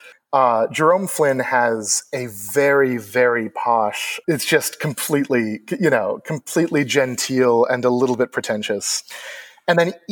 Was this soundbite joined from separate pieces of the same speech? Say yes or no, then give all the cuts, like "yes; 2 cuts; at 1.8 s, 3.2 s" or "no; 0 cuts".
yes; 1 cut; at 4.2 s